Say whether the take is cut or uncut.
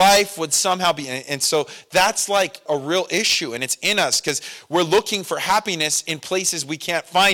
cut